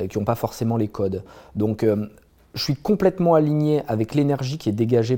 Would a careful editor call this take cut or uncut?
uncut